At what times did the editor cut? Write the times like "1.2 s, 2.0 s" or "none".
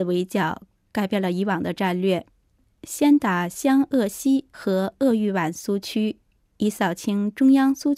none